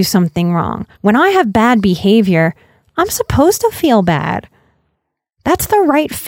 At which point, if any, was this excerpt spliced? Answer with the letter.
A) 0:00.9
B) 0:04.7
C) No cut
A